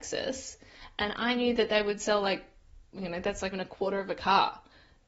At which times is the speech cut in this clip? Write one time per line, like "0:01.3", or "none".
0:03.5